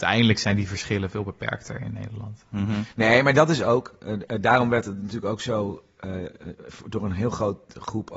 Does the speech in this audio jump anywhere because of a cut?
no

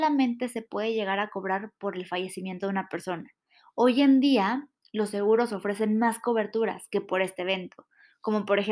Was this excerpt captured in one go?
yes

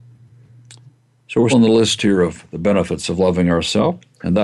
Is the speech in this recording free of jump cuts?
no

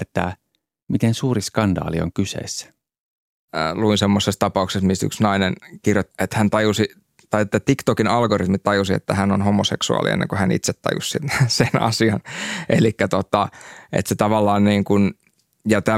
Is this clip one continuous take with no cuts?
no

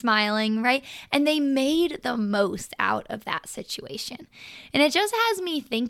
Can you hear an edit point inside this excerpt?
no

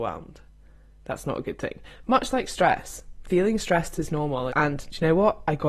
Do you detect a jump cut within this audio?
yes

